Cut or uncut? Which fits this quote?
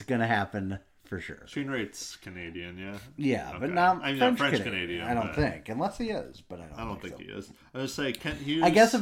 uncut